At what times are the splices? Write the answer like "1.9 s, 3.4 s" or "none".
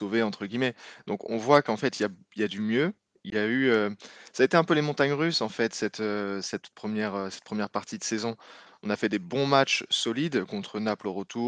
8.7 s